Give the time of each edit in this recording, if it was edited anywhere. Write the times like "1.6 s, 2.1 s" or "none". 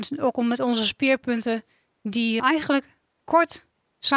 2.4 s